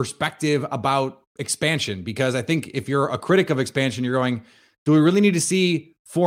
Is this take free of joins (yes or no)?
yes